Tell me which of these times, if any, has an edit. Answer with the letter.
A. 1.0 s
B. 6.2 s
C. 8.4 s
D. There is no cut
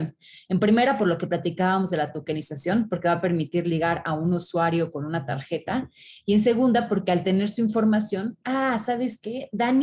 C